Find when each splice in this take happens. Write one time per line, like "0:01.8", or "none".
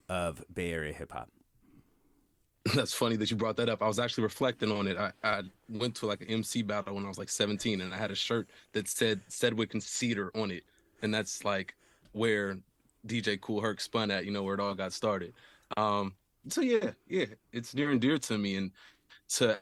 none